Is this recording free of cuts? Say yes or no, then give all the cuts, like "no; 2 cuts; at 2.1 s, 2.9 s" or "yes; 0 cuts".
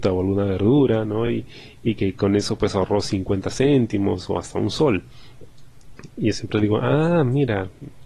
yes; 0 cuts